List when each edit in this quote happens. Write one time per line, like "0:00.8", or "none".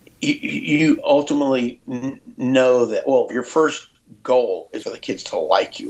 0:03.3
0:04.8